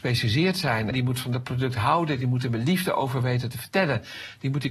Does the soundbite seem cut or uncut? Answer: cut